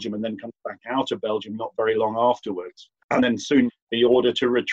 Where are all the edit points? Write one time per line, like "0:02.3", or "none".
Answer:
0:03.0

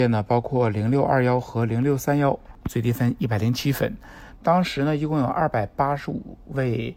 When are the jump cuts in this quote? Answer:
0:02.6
0:04.4

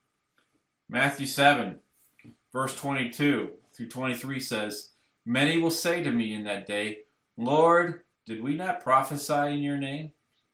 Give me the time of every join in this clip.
0:08.1

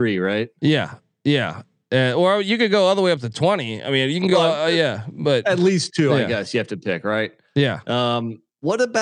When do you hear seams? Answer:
none

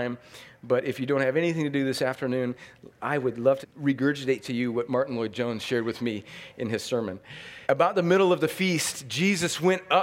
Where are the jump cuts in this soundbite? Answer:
0:03.6
0:07.6

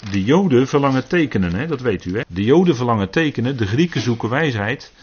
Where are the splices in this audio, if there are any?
0:02.2

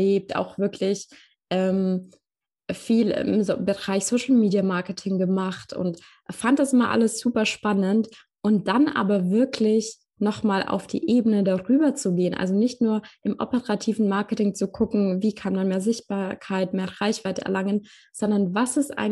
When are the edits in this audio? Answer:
none

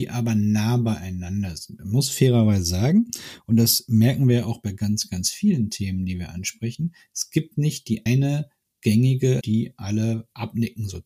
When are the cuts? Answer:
0:08.1
0:09.4

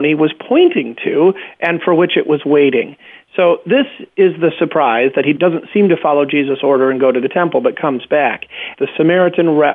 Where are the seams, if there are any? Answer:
0:03.2
0:08.7

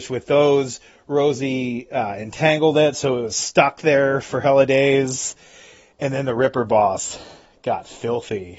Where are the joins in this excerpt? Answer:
none

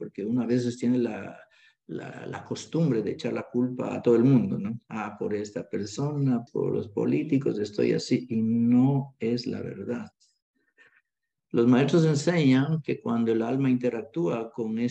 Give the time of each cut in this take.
0:06.5

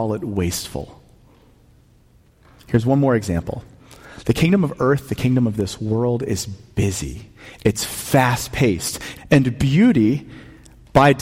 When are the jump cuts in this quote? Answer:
0:09.2

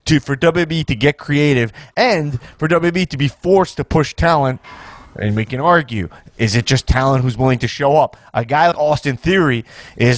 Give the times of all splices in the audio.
0:08.7

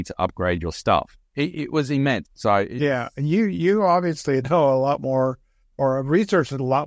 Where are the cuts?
0:01.2
0:02.2

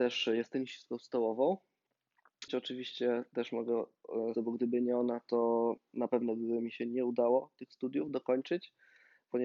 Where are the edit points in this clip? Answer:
0:02.5
0:04.4

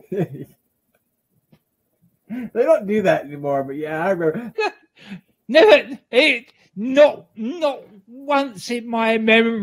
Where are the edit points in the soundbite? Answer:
0:04.5

